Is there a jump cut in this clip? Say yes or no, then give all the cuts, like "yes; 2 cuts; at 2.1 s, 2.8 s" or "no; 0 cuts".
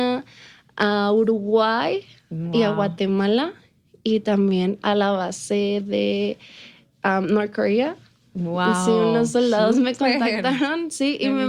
no; 0 cuts